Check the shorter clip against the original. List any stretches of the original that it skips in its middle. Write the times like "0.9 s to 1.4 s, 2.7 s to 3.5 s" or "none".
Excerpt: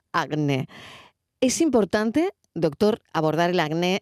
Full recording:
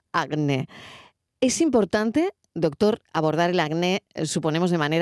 none